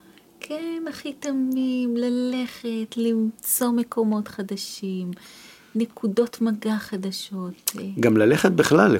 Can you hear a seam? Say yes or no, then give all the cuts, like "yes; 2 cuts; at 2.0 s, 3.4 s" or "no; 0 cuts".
no; 0 cuts